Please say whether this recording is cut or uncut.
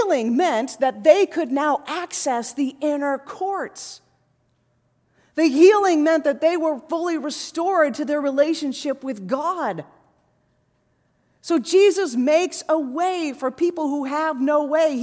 uncut